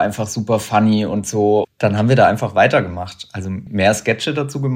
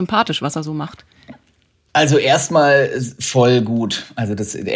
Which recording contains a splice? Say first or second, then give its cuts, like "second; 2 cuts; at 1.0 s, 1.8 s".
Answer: first; 1 cut; at 1.6 s